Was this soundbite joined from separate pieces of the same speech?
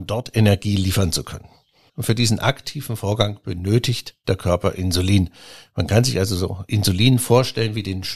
yes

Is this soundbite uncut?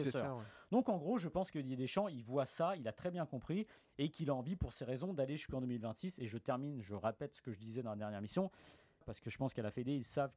no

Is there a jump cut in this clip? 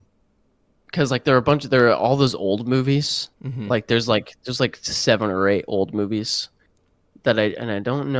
yes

